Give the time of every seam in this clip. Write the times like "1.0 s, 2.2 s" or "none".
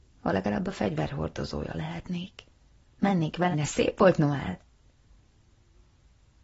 3.5 s